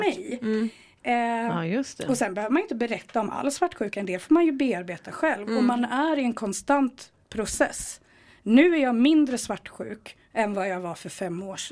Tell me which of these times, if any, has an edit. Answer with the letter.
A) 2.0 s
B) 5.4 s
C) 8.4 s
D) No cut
D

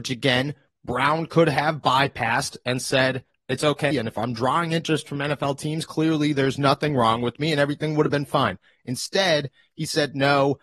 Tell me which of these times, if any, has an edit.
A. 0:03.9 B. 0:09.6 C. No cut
A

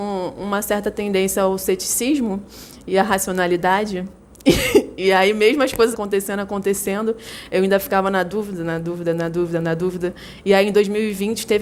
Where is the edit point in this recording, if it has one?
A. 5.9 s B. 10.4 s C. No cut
A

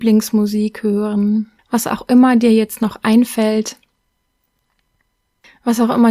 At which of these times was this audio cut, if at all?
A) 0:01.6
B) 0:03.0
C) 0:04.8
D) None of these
A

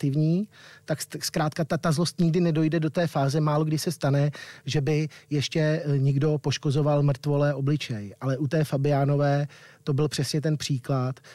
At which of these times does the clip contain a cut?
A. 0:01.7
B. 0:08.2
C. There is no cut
A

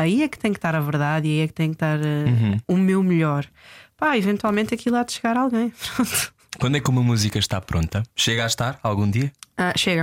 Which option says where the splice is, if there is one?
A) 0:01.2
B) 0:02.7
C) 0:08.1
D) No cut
C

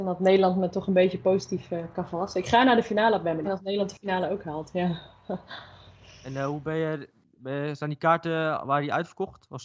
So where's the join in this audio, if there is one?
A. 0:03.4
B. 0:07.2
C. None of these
A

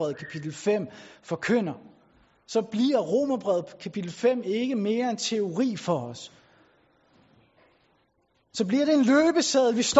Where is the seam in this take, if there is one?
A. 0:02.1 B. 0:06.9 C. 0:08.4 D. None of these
D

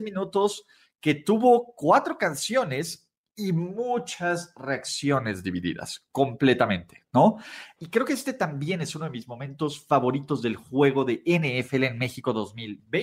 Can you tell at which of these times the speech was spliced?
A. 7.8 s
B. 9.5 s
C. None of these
A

